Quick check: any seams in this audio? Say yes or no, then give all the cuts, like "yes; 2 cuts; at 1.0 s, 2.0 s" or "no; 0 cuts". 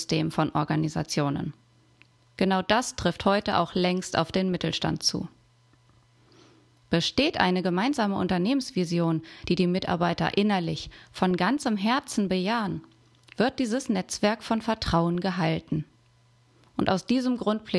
no; 0 cuts